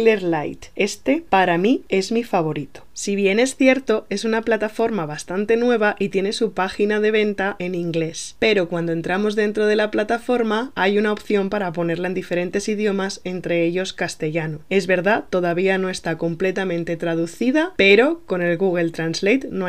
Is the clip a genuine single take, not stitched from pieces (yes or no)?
no